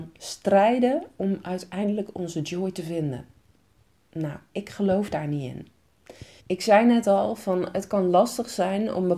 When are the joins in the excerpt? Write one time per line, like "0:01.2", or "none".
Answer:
0:06.4